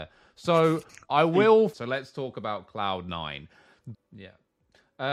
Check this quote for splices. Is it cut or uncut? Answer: cut